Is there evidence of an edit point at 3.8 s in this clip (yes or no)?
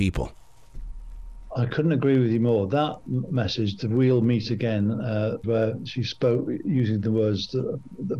no